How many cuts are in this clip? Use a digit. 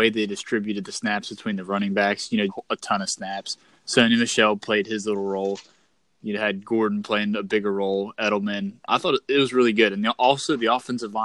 1